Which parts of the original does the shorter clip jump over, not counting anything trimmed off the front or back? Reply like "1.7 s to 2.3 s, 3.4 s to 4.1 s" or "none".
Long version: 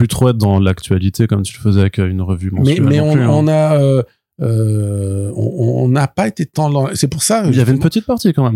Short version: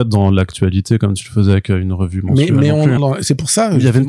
3.3 s to 6.7 s